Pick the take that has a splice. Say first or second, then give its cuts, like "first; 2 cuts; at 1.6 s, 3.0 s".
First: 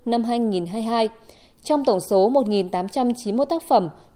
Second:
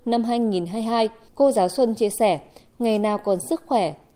second; 1 cut; at 1.3 s